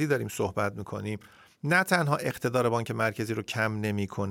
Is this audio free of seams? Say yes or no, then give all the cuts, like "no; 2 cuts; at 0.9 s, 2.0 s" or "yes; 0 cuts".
yes; 0 cuts